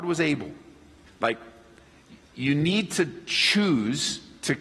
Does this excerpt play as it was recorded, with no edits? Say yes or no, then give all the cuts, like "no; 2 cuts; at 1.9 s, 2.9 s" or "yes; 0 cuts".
no; 1 cut; at 1.1 s